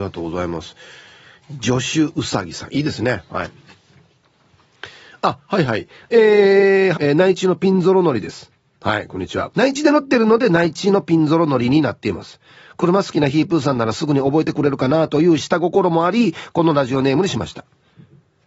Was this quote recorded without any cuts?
no; 2 cuts; at 6.9 s, 9.5 s

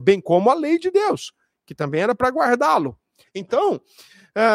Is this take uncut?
no; 1 cut; at 3.3 s

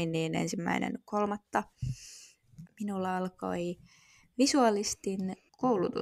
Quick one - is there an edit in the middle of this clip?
yes; 1 cut; at 2.7 s

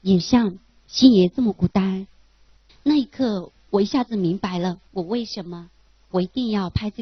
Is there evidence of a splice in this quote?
yes; 2 cuts; at 2.7 s, 4.9 s

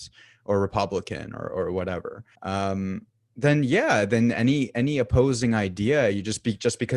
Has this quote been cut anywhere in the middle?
yes; 1 cut; at 2.4 s

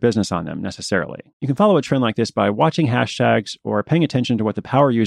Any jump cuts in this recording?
yes; 1 cut; at 1.3 s

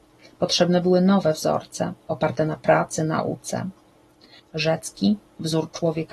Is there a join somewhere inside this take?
yes; 1 cut; at 4.4 s

